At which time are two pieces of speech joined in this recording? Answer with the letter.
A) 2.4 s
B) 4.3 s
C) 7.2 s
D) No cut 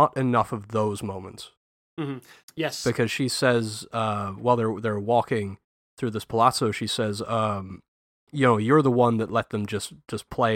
A